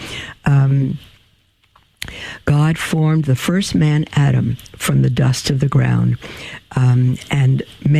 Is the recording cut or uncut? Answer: uncut